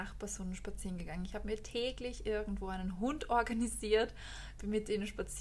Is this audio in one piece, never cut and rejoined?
yes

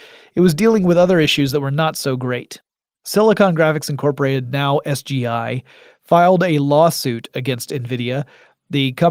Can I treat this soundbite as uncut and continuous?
yes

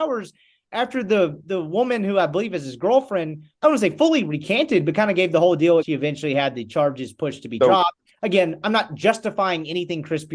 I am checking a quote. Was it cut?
yes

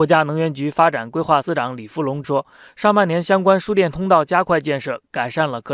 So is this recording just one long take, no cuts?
no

